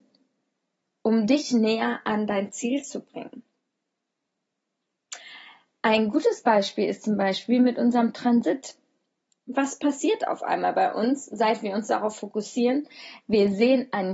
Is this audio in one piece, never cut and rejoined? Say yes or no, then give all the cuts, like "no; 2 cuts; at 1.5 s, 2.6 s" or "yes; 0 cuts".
yes; 0 cuts